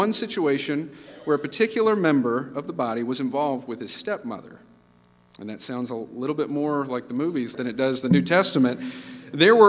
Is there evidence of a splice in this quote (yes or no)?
yes